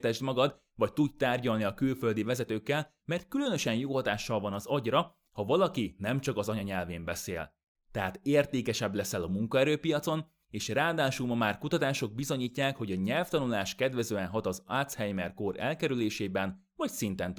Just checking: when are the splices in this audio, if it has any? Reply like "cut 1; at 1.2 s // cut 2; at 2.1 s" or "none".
cut 1; at 3.0 s